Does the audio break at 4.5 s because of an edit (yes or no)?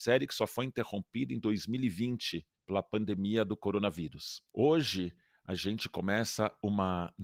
yes